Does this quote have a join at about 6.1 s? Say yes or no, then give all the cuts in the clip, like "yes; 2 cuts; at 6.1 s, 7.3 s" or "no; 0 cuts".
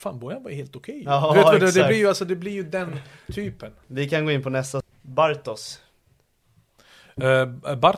no; 0 cuts